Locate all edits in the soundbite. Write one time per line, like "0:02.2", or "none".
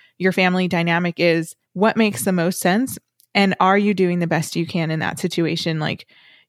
0:01.6

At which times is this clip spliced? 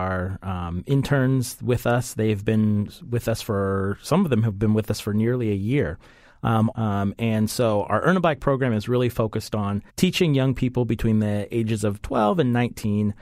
0:06.7
0:09.9

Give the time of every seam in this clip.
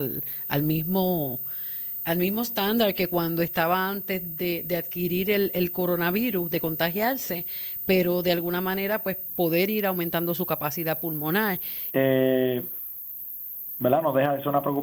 0:11.9

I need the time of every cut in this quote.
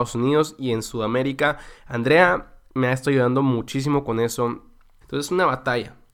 0:05.0

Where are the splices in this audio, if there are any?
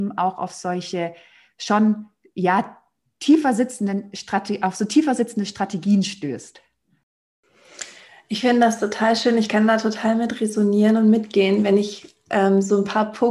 none

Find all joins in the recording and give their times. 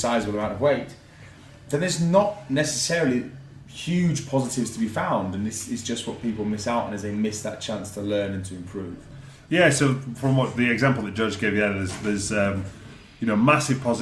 none

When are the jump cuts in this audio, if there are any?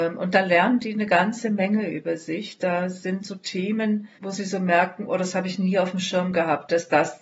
0:04.2

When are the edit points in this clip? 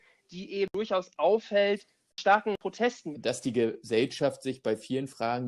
0:03.1

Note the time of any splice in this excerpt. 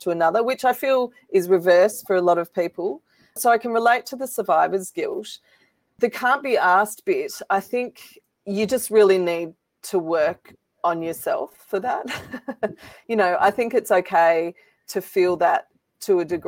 none

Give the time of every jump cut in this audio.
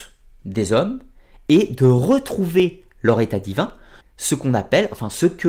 0:04.0

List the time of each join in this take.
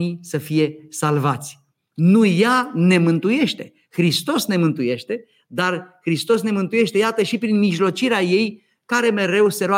0:01.9

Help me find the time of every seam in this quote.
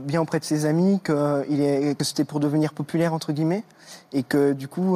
none

